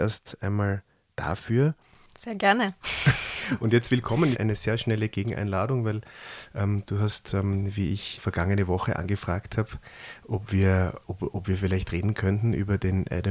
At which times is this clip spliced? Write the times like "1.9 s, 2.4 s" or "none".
4.3 s, 8.2 s, 11.0 s